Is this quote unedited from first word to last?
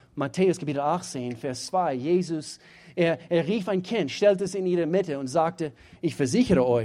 yes; 0 cuts

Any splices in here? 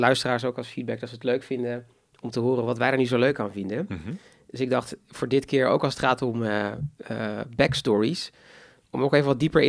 no; 0 cuts

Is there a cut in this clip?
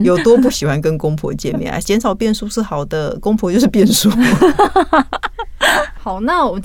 yes; 1 cut; at 1.8 s

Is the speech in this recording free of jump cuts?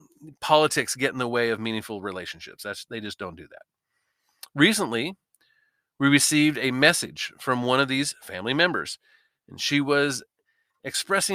yes; 0 cuts

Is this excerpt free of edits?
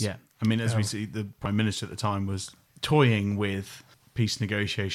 yes; 0 cuts

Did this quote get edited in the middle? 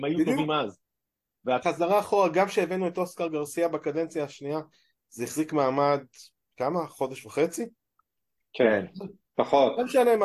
yes; 1 cut; at 1.6 s

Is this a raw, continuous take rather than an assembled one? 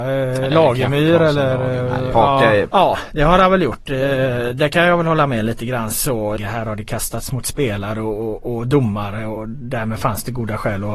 no; 3 cuts; at 2.7 s, 6.4 s, 9.4 s

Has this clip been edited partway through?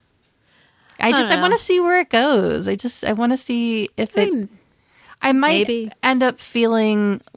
no; 0 cuts

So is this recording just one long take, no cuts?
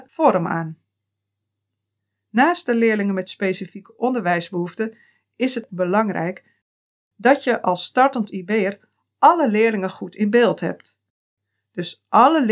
yes; 0 cuts

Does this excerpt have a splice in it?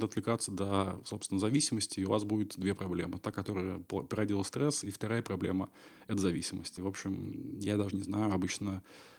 no; 0 cuts

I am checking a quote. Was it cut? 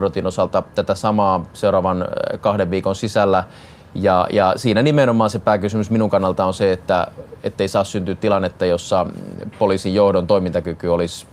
no; 0 cuts

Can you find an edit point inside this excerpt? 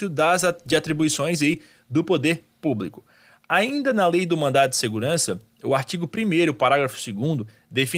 no; 0 cuts

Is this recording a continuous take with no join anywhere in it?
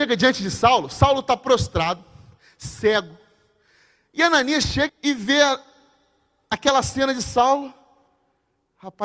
no; 1 cut; at 4.9 s

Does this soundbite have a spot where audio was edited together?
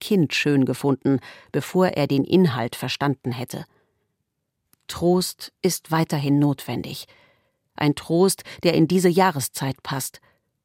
no; 0 cuts

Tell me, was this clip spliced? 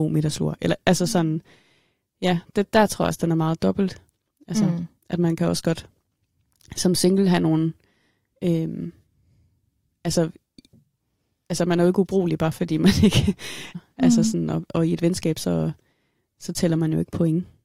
yes; 1 cut; at 13.7 s

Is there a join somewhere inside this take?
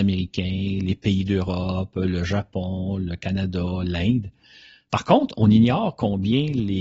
no; 0 cuts

